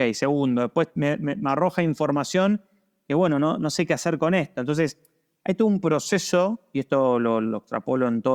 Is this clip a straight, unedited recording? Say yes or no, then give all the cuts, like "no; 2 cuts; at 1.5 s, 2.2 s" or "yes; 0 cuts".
yes; 0 cuts